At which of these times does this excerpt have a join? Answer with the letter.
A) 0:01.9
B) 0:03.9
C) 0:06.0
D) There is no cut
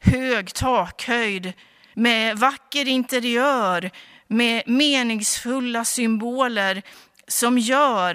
A